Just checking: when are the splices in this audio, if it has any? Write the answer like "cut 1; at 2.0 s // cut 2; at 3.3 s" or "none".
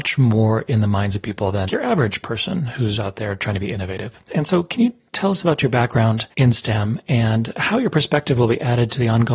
cut 1; at 1.7 s // cut 2; at 4.3 s // cut 3; at 6.3 s